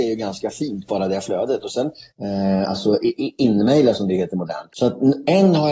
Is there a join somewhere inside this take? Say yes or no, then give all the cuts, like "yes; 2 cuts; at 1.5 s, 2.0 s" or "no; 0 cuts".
yes; 2 cuts; at 2.1 s, 4.7 s